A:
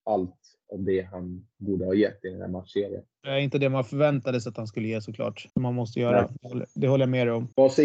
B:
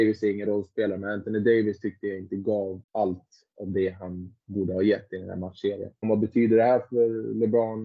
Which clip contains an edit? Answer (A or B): B